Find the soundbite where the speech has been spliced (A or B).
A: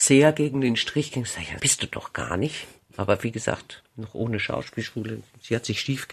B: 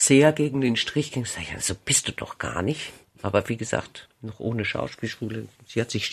A